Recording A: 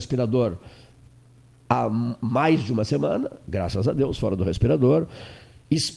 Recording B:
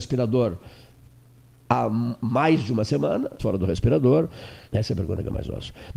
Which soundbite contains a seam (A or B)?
B